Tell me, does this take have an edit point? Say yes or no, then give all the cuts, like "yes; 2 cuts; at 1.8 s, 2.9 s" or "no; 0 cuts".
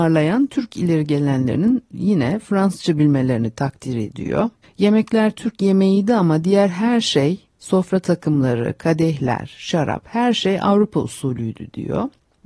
yes; 1 cut; at 4.6 s